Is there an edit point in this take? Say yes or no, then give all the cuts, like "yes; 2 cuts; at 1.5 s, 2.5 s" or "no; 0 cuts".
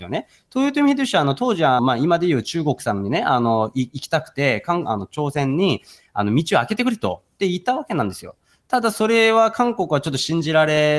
yes; 1 cut; at 1.8 s